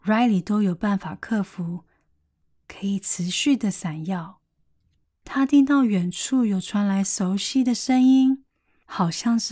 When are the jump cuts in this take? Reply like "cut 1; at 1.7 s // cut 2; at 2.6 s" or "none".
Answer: cut 1; at 5.2 s